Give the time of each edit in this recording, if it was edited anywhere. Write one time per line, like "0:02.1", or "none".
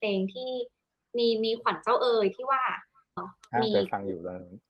0:03.2